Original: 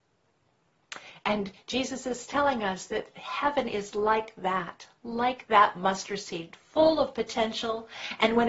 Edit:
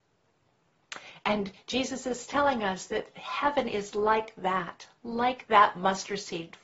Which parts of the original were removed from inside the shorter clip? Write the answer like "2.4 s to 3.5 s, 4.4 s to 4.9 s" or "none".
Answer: none